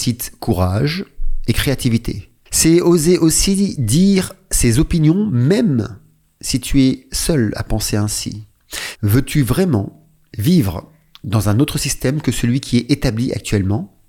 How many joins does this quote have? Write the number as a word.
two